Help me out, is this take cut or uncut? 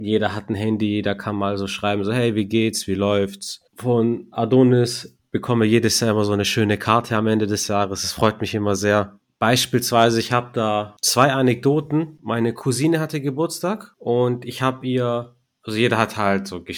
cut